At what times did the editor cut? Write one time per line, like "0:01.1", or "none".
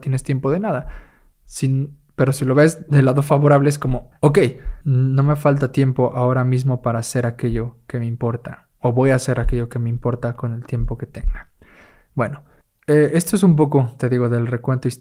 none

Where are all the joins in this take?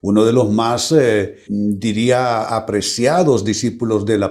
0:01.5

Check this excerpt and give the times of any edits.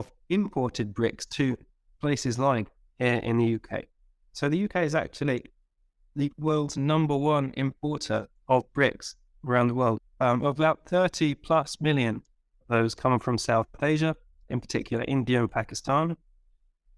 0:10.0
0:14.5

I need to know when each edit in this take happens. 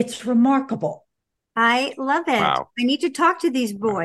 none

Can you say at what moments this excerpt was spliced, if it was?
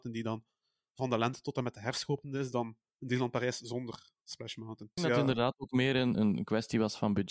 0:05.0
0:06.1

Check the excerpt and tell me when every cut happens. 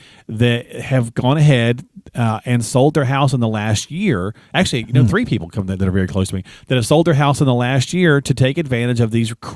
none

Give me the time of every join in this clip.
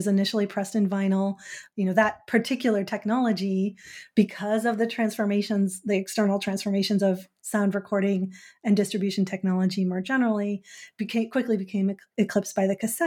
0:01.7

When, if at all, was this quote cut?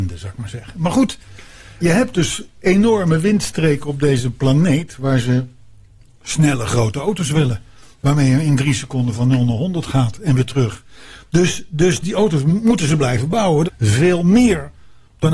0:01.8
0:13.6

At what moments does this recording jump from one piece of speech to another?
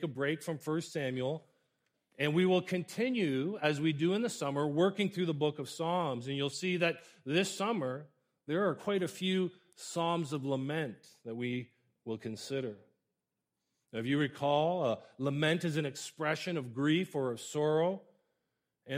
none

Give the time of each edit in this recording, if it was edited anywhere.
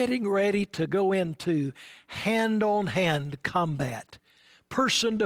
none

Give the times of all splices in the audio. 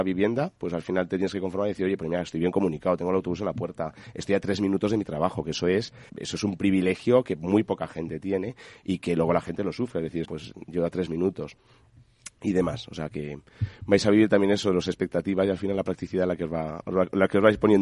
0:06.1
0:10.2

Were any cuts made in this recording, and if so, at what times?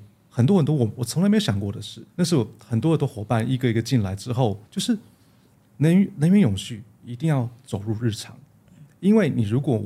0:02.1
0:04.6

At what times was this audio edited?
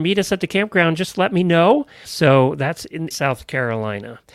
0:02.0
0:03.1

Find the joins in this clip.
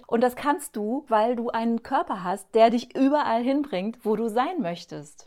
none

